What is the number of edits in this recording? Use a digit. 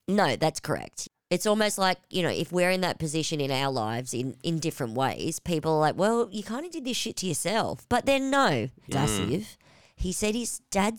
1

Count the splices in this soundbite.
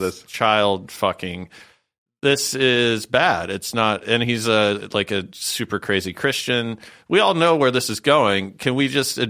0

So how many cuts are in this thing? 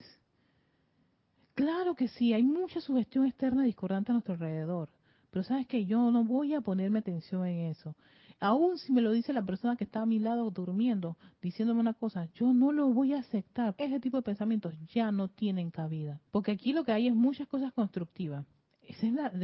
2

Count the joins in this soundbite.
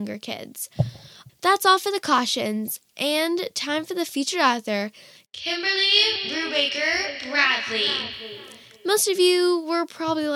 1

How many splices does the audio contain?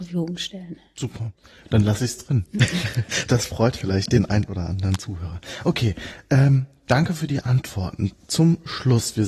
0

